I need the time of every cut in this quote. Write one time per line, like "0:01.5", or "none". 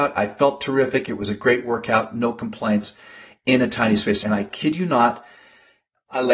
0:04.2